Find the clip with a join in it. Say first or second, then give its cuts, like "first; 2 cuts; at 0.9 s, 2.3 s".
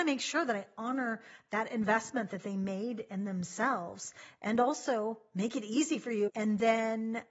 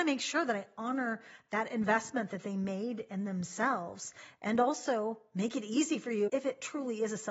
first; 1 cut; at 6.3 s